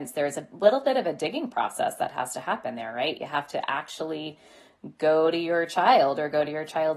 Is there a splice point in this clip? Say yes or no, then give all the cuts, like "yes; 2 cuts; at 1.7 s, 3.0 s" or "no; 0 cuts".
no; 0 cuts